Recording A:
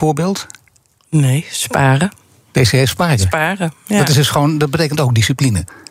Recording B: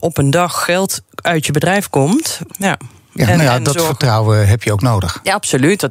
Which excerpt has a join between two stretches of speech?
B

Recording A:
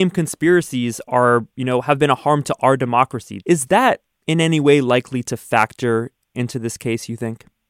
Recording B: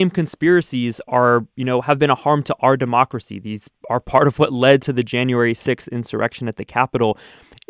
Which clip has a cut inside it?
A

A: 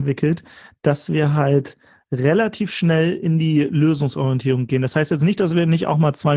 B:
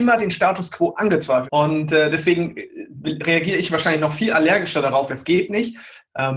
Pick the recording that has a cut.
B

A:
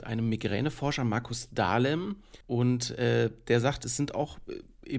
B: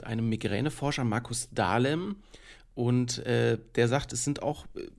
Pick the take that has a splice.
A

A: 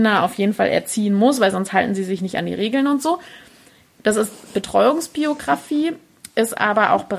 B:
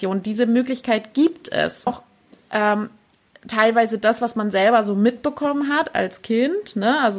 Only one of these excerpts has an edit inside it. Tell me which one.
B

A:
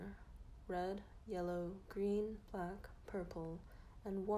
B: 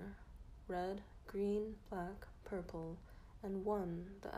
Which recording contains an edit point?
B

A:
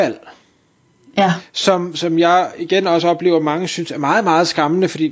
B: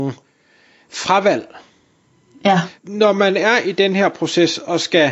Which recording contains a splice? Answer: B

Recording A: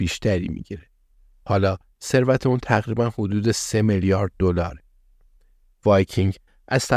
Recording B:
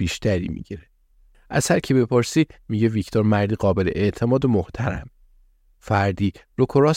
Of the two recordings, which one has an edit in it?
B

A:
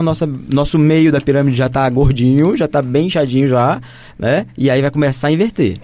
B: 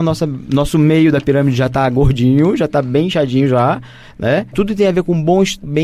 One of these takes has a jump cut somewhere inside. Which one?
B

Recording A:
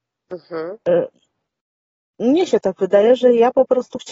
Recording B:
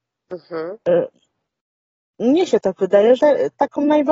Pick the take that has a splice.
B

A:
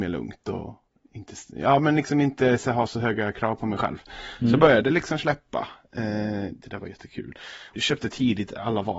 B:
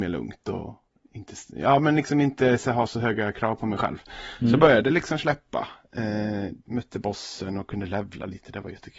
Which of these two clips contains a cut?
A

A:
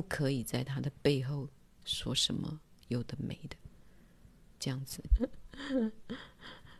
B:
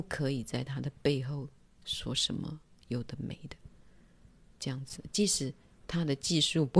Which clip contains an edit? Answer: A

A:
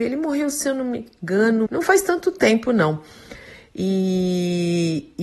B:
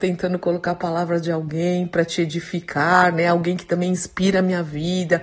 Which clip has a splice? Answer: A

